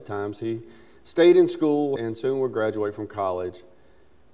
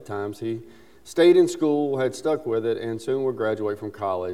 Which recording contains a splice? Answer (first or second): first